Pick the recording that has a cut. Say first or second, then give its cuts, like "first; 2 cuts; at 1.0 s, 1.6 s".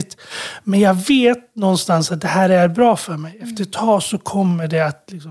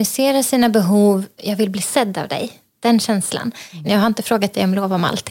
second; 2 cuts; at 1.4 s, 3.8 s